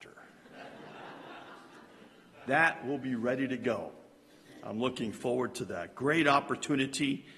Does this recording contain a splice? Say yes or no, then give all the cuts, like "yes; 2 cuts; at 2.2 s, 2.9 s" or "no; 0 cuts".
no; 0 cuts